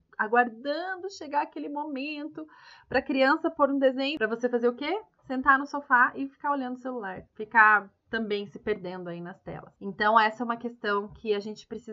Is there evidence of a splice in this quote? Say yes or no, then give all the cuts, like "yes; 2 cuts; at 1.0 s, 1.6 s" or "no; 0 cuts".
no; 0 cuts